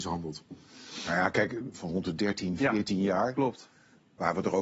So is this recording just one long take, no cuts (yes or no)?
no